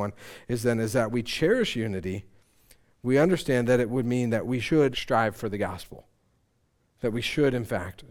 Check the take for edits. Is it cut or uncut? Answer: cut